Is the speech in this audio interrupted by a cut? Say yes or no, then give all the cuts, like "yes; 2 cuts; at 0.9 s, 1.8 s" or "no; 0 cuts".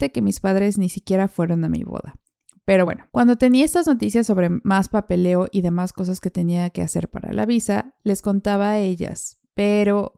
no; 0 cuts